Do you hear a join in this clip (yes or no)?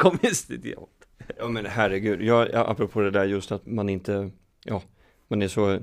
yes